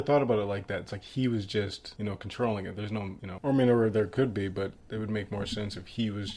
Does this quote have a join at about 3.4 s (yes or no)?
yes